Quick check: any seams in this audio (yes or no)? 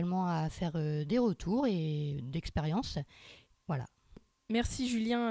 yes